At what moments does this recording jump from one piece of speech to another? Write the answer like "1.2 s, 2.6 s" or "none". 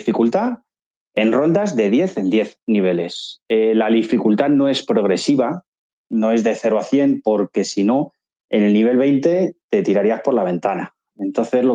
none